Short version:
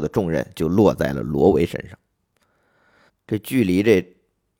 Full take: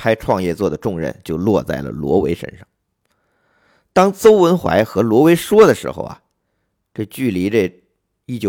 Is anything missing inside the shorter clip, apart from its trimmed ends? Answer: yes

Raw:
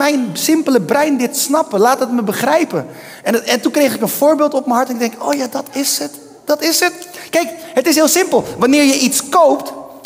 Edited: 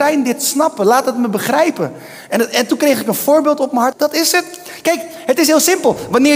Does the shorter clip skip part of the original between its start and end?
yes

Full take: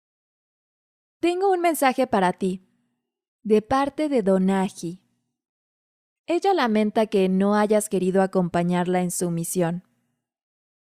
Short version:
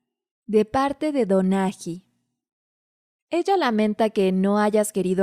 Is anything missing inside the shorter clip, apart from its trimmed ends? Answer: no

